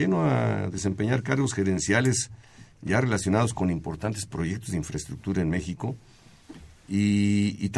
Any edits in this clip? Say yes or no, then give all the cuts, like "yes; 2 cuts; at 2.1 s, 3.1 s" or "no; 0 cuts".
no; 0 cuts